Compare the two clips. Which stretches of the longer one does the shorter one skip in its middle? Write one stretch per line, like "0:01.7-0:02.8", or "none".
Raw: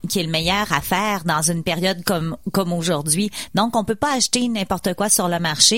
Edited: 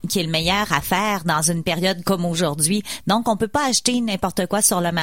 0:02.0-0:02.5